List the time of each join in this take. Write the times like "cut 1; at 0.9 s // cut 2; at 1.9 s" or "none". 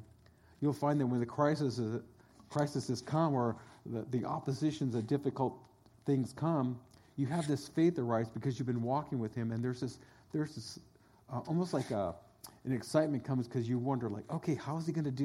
none